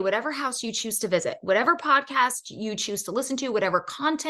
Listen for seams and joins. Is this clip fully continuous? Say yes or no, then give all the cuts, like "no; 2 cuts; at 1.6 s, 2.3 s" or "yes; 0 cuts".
yes; 0 cuts